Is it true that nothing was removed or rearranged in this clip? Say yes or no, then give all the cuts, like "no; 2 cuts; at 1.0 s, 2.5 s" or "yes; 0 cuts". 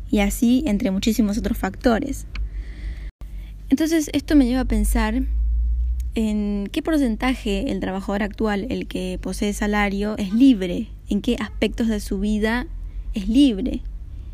yes; 0 cuts